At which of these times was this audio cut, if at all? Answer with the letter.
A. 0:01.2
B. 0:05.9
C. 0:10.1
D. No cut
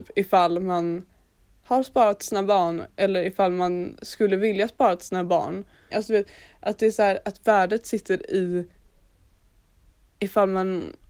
B